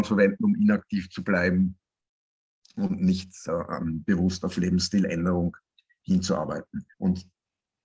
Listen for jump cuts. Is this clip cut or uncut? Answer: cut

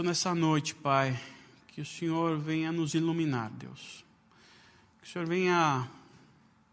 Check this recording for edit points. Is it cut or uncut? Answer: uncut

